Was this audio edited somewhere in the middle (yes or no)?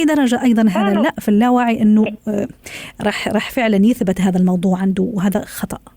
no